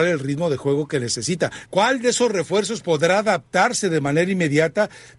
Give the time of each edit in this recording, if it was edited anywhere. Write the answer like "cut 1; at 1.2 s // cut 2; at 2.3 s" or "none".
cut 1; at 1.7 s